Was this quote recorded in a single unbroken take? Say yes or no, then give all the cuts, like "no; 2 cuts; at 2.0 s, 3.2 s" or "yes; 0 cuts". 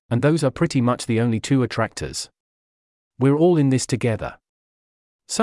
yes; 0 cuts